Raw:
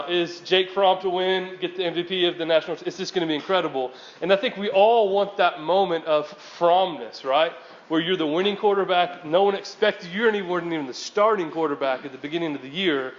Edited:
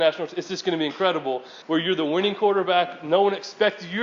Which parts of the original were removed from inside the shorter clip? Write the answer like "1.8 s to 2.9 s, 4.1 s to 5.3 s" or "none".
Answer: 4.1 s to 7.8 s